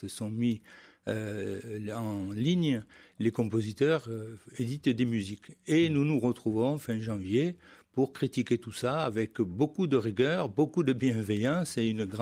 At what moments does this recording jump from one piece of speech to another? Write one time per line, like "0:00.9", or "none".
none

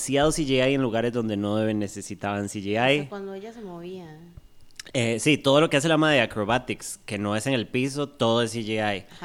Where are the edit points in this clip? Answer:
none

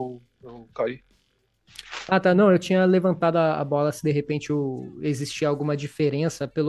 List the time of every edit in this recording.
none

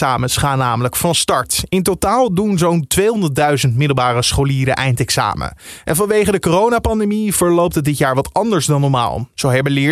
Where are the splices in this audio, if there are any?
none

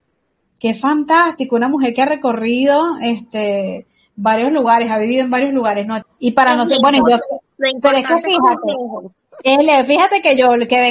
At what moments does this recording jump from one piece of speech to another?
0:06.0

